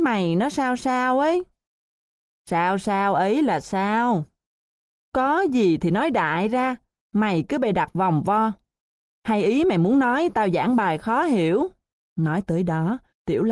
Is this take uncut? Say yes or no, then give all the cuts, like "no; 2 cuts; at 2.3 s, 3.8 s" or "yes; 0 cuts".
no; 2 cuts; at 4.9 s, 12.0 s